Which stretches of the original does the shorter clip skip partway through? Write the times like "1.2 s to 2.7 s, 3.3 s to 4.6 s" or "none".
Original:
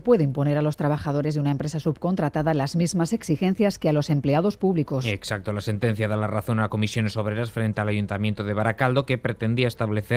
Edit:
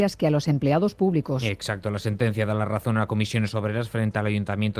none